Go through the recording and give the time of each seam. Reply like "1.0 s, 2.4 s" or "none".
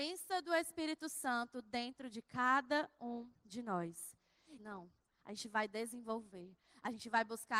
4.6 s